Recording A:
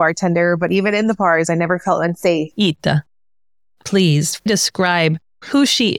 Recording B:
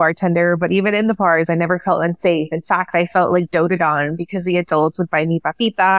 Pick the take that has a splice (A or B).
A